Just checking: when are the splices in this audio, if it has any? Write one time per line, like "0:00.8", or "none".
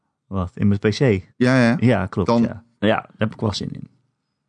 0:01.3
0:02.7